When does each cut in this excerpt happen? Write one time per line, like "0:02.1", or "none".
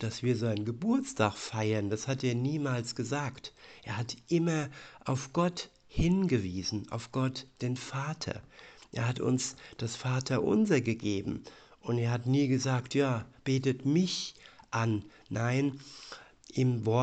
none